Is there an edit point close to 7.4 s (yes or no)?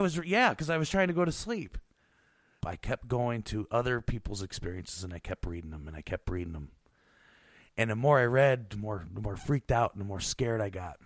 no